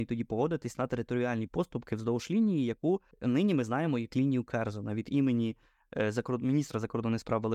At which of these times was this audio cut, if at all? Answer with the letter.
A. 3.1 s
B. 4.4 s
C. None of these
A